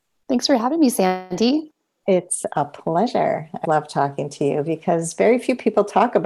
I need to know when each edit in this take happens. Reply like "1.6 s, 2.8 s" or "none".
3.6 s